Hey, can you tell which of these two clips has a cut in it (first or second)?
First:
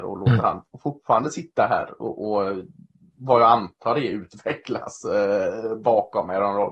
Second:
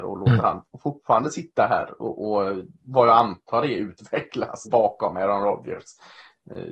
second